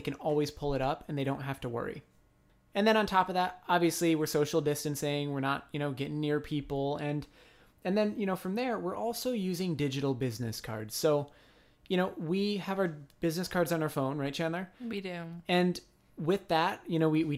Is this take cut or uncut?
uncut